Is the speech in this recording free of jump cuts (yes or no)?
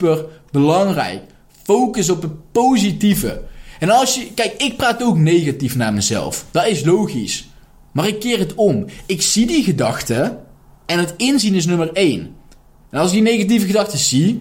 yes